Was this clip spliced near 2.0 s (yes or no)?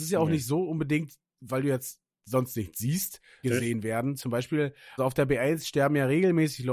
no